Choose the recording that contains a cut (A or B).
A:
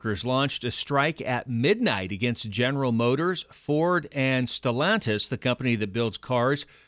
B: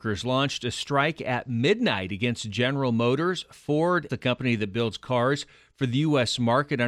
B